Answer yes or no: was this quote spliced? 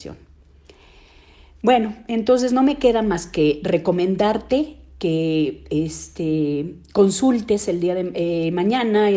no